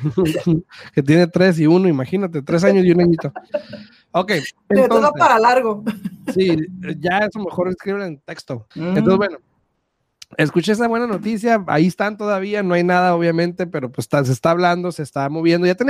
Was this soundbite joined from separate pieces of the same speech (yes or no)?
yes